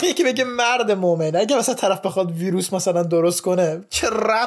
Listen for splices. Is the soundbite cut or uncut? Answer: uncut